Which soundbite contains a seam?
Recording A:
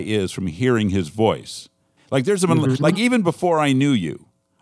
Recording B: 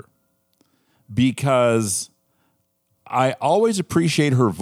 A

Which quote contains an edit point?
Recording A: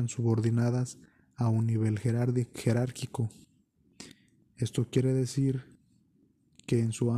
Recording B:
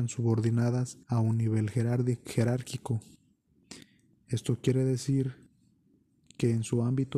B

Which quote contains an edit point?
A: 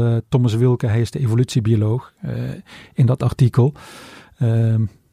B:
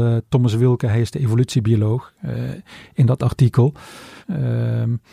B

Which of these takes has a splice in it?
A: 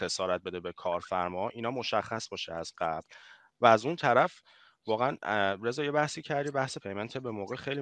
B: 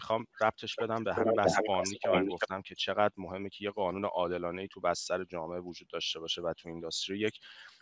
A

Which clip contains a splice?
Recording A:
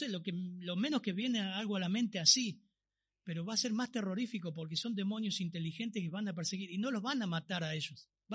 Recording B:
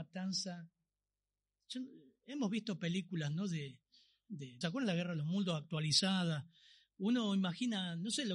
B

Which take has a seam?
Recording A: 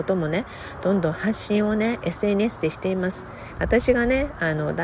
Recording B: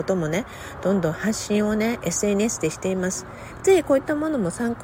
A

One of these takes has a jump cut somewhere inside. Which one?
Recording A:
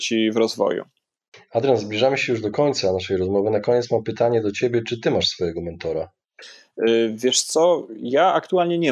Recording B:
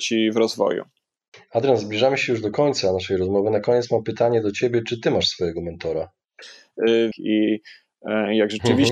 B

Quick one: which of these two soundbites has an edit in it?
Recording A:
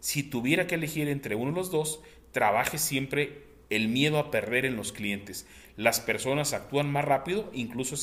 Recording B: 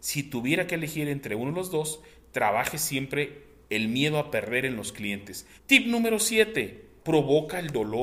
B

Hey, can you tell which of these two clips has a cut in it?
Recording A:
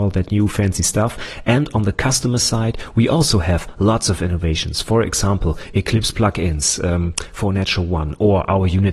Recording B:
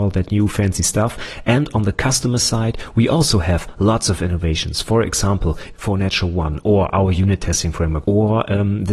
B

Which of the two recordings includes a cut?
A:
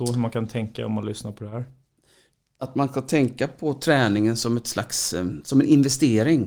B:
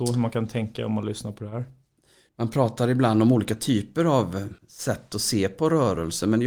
B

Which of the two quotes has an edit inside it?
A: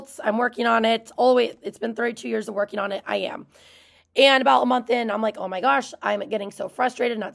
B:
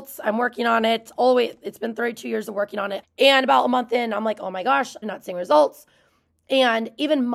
B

